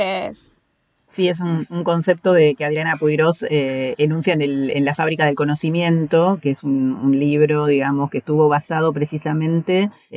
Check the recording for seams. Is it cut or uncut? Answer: uncut